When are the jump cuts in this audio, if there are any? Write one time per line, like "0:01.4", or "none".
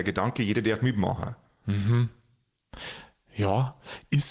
none